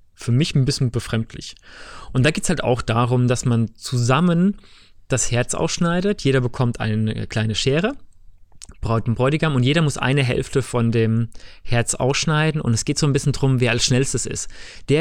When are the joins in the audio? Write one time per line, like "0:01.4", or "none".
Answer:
none